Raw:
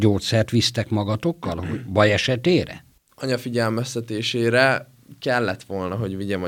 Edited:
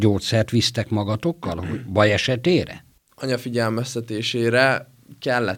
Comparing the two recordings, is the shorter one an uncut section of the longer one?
yes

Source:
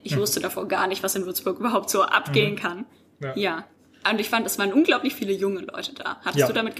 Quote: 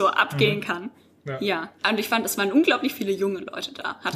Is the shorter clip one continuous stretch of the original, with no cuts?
no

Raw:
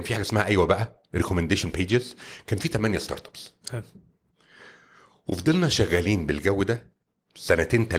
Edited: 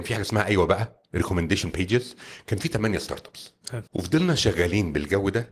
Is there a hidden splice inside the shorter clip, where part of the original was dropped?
yes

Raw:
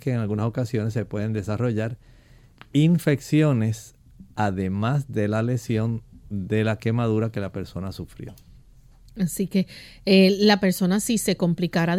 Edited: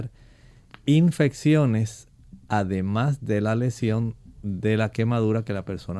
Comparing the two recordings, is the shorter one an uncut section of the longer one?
yes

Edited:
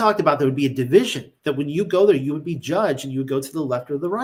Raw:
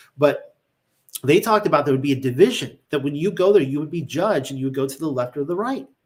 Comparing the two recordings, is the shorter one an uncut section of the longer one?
yes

